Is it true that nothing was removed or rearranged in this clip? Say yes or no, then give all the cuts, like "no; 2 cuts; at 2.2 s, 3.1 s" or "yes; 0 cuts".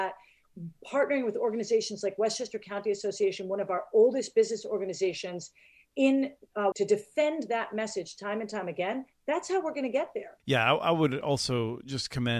no; 2 cuts; at 6.7 s, 10.4 s